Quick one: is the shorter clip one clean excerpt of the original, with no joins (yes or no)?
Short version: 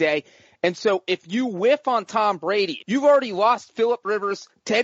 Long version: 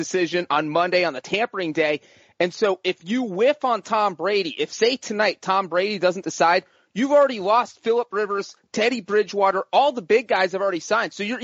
no